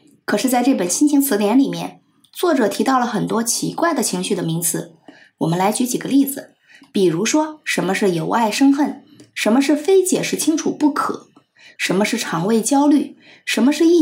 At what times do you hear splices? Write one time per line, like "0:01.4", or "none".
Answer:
0:11.8